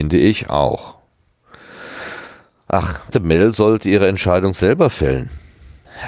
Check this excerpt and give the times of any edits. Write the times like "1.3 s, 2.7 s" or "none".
3.1 s